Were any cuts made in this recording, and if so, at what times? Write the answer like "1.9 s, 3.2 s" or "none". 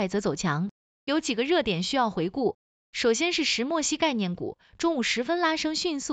none